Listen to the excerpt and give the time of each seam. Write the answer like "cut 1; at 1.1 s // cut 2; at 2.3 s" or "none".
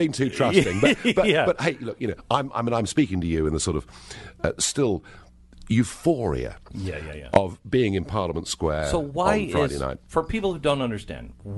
none